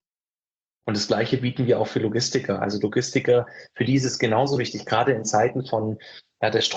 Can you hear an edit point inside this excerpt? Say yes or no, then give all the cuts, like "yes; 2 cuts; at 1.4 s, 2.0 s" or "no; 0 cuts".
no; 0 cuts